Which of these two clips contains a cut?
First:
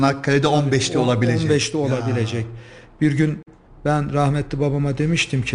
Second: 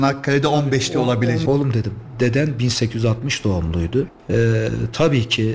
second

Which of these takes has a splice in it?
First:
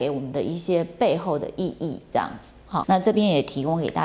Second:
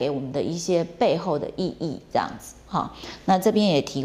first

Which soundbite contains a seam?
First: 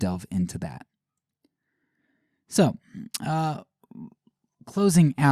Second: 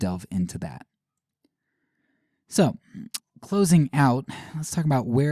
second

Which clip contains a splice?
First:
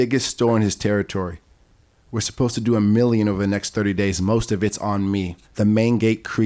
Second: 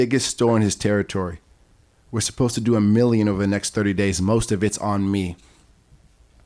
first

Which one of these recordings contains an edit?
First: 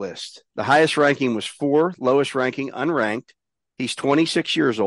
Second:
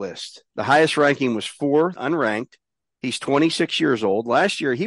second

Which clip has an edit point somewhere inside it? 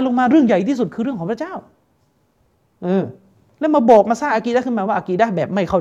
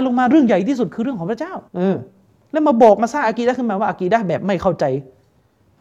second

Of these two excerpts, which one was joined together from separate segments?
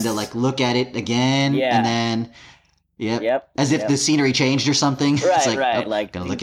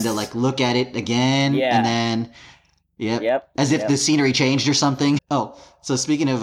second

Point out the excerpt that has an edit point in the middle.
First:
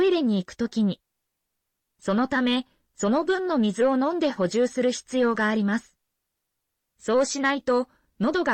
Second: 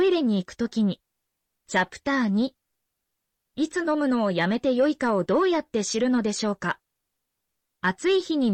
second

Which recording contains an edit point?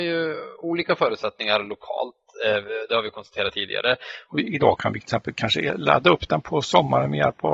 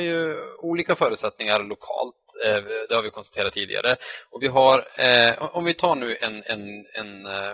first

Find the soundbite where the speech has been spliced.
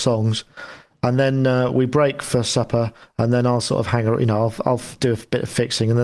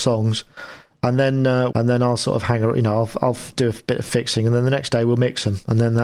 second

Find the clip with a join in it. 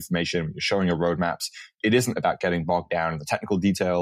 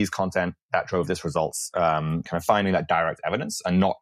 second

